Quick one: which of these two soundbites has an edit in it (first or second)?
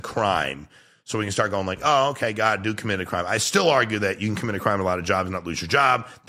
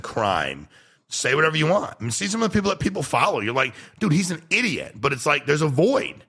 second